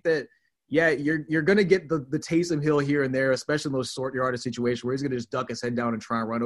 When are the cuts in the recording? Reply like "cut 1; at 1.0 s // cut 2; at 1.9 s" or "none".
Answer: none